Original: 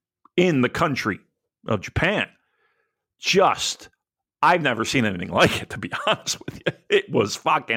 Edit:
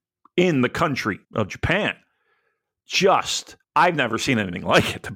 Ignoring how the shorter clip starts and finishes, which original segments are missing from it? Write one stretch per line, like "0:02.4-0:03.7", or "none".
0:01.2-0:01.6
0:04.0-0:04.3